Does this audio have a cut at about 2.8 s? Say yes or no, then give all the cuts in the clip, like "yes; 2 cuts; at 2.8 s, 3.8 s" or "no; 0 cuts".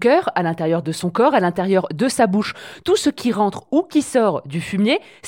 no; 0 cuts